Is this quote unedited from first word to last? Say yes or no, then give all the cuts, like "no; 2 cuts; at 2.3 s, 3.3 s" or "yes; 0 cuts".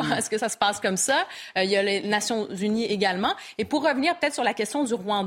yes; 0 cuts